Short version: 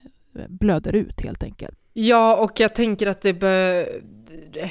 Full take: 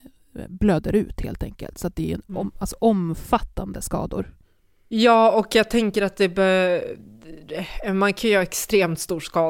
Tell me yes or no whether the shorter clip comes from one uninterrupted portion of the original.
no